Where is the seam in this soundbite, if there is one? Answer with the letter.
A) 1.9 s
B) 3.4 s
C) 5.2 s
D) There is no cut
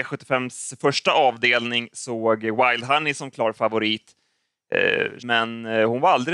C